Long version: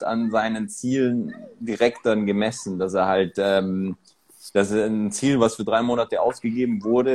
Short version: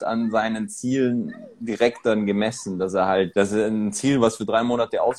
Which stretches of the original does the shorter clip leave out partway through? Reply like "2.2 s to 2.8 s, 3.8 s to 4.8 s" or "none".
3.3 s to 4.5 s